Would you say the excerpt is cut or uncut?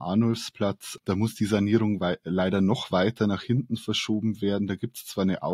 uncut